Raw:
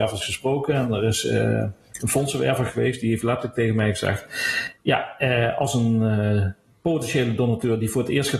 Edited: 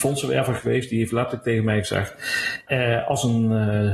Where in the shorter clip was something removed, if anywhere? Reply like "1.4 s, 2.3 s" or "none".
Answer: 2.7 s